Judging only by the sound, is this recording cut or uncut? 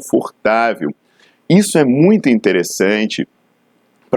uncut